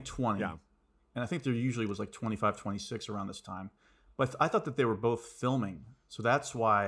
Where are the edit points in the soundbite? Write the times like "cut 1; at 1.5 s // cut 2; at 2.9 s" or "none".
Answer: none